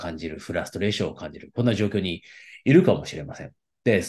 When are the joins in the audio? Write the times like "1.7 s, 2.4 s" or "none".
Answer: none